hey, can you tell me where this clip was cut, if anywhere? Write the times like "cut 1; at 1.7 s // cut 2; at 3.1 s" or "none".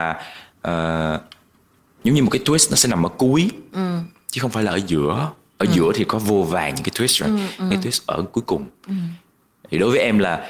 cut 1; at 7.7 s